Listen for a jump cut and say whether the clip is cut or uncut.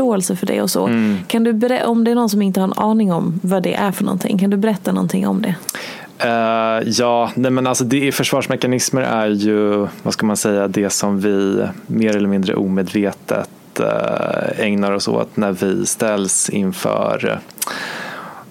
uncut